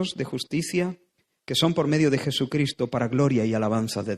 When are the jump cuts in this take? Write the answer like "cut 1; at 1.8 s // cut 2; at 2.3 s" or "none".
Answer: none